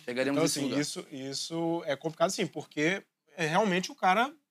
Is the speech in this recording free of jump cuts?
yes; 0 cuts

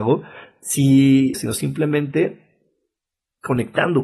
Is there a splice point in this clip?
yes; 1 cut; at 1.3 s

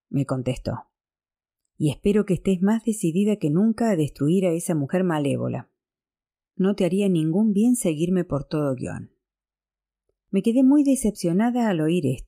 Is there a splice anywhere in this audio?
yes; 1 cut; at 6.5 s

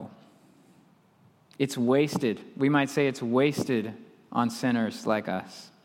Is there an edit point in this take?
no; 0 cuts

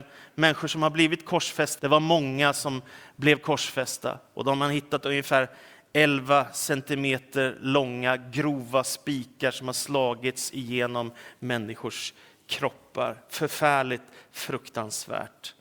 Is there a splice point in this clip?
yes; 1 cut; at 1.8 s

